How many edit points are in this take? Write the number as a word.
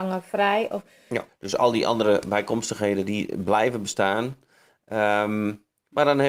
one